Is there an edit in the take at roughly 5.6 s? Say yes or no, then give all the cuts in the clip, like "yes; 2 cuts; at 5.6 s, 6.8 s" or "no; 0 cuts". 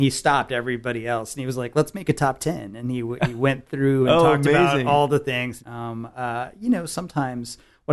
yes; 1 cut; at 5.6 s